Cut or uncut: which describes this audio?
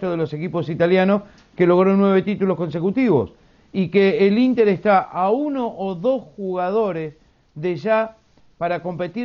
uncut